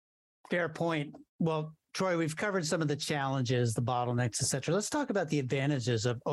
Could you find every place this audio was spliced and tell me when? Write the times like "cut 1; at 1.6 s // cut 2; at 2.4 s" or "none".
cut 1; at 1.3 s